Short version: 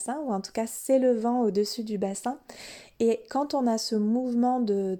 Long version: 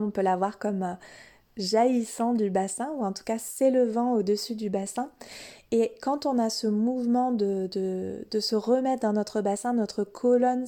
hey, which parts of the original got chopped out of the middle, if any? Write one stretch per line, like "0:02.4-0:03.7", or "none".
none